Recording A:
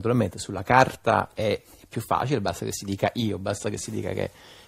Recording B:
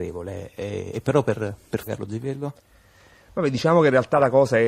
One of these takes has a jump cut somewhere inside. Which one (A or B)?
B